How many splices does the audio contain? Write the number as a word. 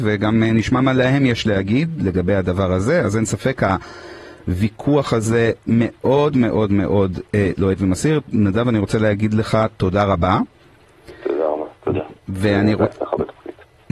zero